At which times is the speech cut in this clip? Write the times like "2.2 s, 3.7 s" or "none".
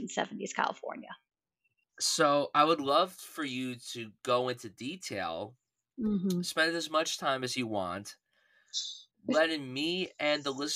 1.8 s